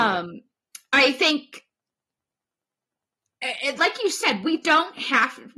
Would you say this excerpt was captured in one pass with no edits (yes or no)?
no